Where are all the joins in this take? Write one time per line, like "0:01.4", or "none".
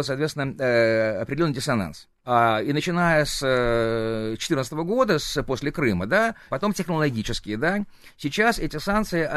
0:02.2
0:06.5